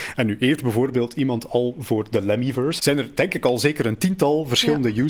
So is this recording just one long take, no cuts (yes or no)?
no